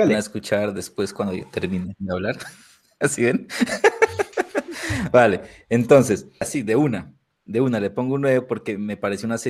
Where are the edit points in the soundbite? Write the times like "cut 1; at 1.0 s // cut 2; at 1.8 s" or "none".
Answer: cut 1; at 6.4 s